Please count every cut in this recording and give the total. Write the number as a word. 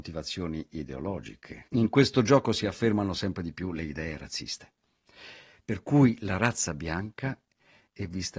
one